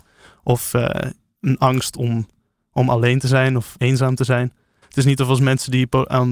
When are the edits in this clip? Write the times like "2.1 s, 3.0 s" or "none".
4.8 s